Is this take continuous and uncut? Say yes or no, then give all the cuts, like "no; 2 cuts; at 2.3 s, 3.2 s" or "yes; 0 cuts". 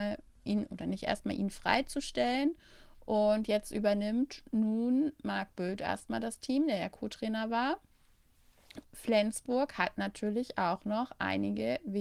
no; 1 cut; at 8.8 s